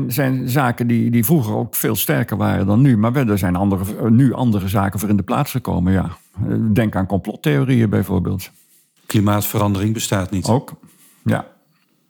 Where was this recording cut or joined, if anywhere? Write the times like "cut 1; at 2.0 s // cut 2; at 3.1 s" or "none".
none